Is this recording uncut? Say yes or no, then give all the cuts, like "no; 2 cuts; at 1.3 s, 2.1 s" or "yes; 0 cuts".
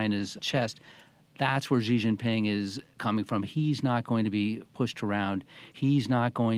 yes; 0 cuts